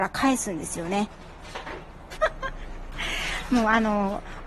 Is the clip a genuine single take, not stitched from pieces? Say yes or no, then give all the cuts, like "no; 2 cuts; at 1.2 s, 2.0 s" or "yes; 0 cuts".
no; 1 cut; at 2.2 s